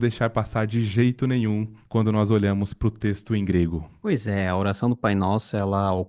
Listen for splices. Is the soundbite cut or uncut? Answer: cut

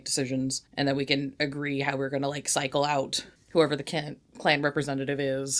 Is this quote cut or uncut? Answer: uncut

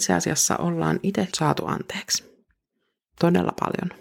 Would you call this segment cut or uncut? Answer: cut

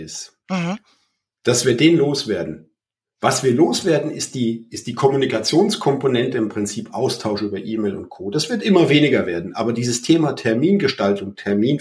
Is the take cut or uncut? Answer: uncut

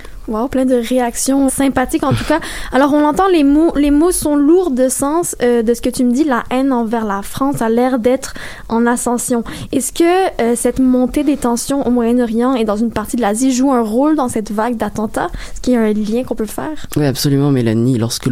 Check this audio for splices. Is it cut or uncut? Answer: cut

